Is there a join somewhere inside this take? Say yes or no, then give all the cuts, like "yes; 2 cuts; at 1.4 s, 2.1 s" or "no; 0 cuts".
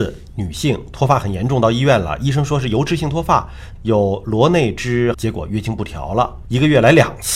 yes; 2 cuts; at 3.8 s, 5.1 s